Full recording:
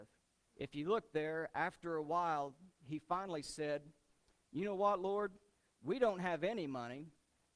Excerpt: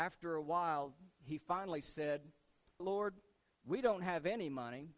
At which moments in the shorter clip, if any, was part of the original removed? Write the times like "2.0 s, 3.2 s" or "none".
2.8 s